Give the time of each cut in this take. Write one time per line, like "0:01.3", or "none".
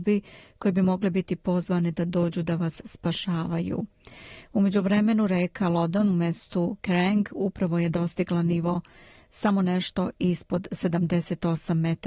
none